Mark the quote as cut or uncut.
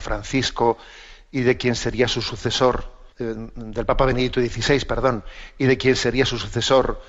cut